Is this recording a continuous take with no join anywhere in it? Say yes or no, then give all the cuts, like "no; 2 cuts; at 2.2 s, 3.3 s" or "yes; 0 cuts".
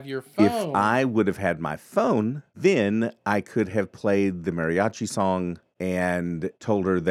yes; 0 cuts